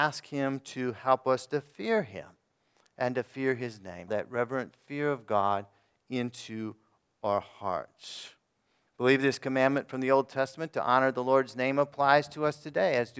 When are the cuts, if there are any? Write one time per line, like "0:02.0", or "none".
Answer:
0:04.1
0:08.9